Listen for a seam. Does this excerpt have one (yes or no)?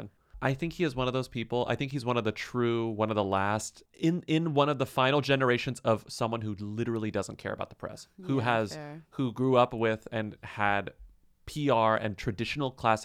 no